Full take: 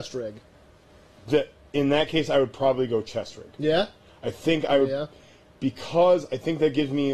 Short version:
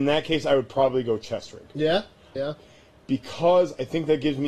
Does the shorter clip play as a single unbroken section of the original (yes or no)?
no